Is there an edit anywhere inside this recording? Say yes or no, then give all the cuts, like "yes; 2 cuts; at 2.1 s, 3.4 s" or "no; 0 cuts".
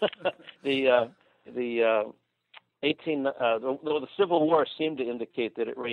yes; 1 cut; at 1.4 s